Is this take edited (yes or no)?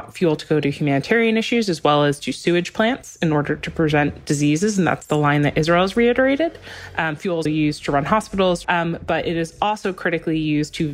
yes